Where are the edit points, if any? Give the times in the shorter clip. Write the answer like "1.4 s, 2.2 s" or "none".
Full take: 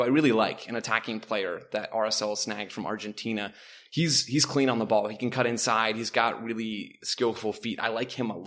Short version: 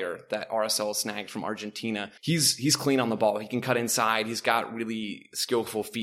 2.2 s

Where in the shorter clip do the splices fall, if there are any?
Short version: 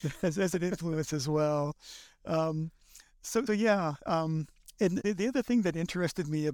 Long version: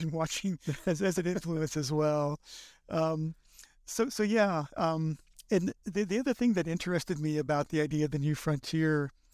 3.5 s, 5.0 s

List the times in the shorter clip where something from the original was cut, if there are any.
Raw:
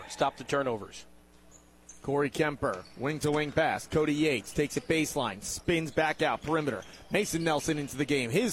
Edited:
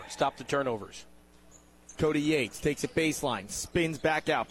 1.9 s

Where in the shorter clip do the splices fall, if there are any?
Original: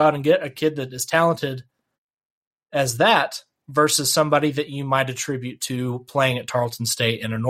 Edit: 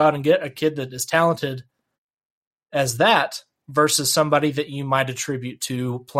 none

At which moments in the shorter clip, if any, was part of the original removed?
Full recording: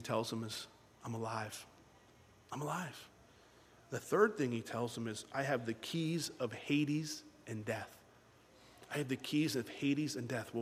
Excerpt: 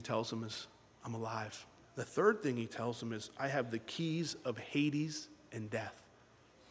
1.8 s

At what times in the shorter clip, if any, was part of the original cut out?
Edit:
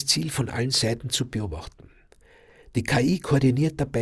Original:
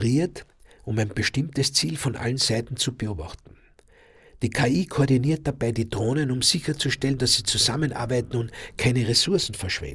none

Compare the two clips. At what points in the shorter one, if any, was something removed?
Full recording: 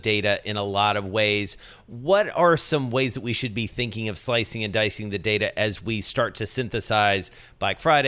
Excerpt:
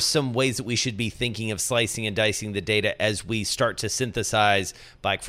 none

